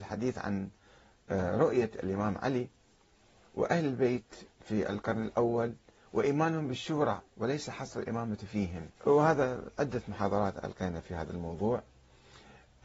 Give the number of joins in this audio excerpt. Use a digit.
1